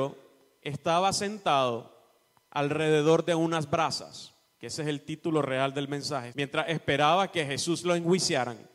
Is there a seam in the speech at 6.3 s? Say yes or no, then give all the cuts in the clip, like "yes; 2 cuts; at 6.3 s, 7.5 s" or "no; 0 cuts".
yes; 1 cut; at 6.3 s